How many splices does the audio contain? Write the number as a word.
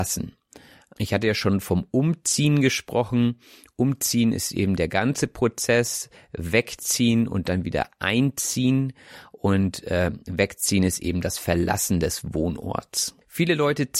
zero